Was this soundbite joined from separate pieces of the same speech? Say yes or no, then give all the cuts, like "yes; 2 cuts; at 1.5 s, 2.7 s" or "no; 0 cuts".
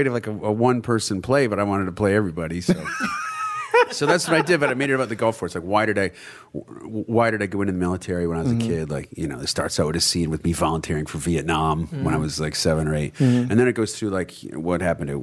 no; 0 cuts